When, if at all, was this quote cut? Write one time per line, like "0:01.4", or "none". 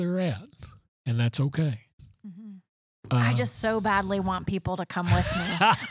none